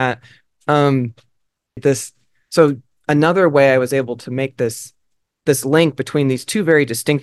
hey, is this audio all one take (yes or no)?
no